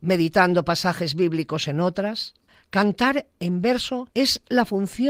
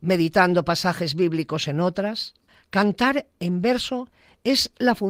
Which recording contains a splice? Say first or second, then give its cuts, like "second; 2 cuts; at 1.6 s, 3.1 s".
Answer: first; 1 cut; at 4.1 s